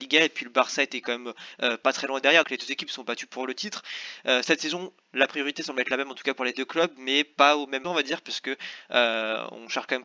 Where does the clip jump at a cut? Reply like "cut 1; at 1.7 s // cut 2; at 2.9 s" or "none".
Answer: cut 1; at 2.4 s // cut 2; at 7.8 s